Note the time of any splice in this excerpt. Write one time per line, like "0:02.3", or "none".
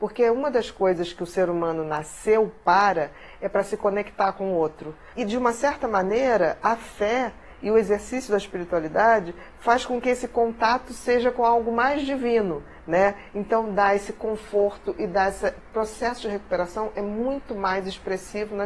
0:05.1